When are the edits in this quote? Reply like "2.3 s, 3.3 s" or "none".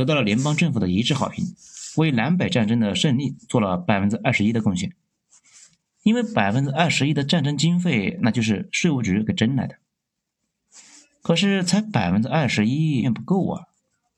13.0 s